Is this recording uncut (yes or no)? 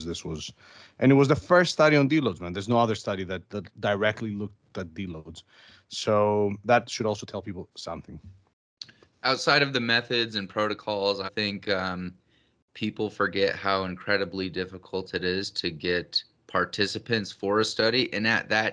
no